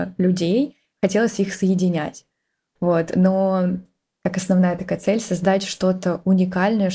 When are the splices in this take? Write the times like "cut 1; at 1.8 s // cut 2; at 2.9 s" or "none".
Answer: cut 1; at 2.8 s

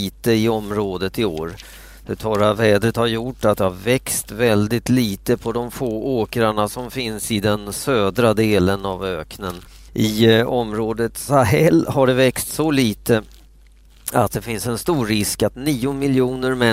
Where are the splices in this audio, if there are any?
cut 1; at 9.9 s

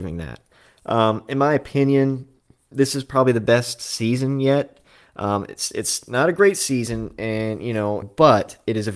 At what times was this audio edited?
cut 1; at 8.0 s

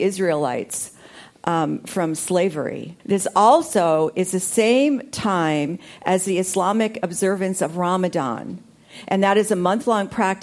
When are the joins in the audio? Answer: cut 1; at 3.0 s

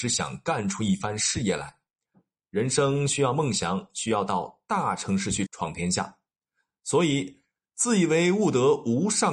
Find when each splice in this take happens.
cut 1; at 5.5 s

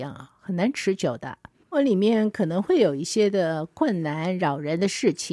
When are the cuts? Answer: cut 1; at 1.6 s

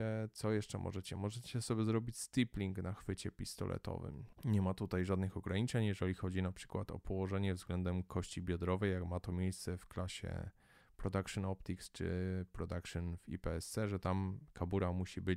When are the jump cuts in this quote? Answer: cut 1; at 4.3 s

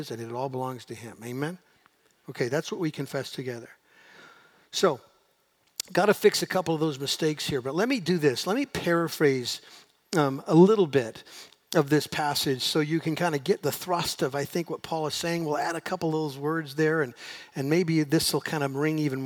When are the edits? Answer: none

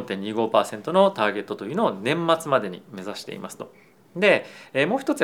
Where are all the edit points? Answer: none

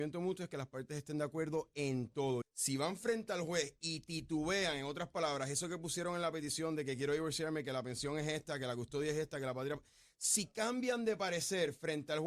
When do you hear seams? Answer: cut 1; at 2.4 s

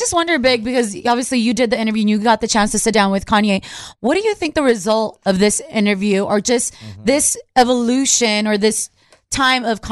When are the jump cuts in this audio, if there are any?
none

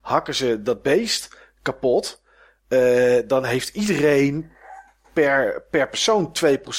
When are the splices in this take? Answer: none

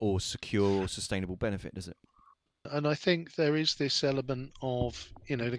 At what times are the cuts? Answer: cut 1; at 2.7 s

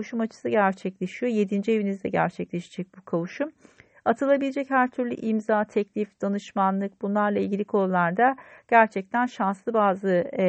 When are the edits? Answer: none

